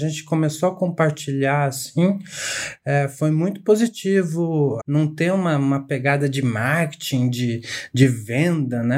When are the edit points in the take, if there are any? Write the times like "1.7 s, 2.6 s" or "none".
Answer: 4.8 s